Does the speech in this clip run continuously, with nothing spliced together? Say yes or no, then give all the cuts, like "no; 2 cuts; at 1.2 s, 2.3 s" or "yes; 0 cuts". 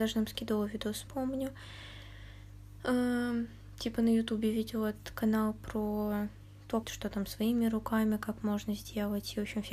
no; 2 cuts; at 1.1 s, 6.8 s